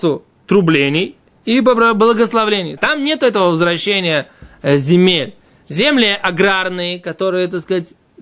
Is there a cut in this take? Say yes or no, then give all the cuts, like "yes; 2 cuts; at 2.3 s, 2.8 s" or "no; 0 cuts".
yes; 1 cut; at 2.8 s